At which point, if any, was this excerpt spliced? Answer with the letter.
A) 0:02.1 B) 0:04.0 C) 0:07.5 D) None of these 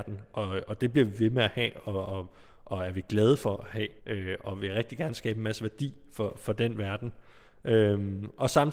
B